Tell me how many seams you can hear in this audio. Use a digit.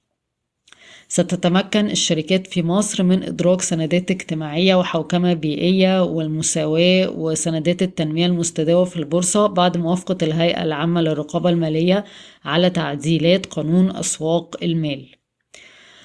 0